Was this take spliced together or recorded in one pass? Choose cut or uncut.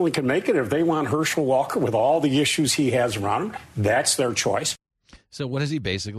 uncut